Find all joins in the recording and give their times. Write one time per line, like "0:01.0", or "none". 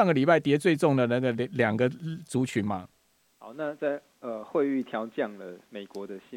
none